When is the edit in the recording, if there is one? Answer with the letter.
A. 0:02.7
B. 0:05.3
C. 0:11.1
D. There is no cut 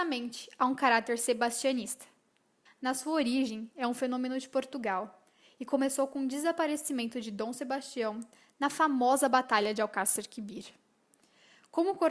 A